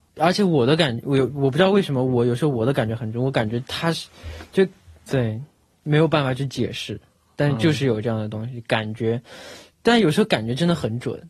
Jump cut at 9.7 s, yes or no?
no